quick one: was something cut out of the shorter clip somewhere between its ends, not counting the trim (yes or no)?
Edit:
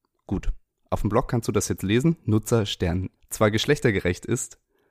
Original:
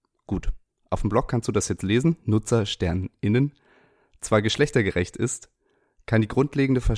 yes